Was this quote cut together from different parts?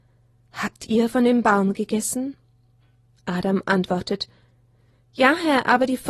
no; 0 cuts

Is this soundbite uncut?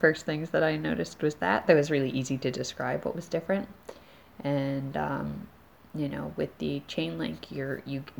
yes; 0 cuts

